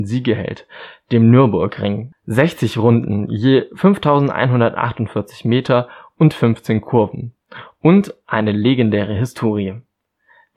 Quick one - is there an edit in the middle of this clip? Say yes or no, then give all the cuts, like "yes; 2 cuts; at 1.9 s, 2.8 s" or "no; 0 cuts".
no; 0 cuts